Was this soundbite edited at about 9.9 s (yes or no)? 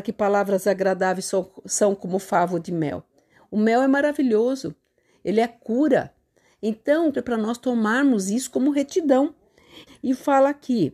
yes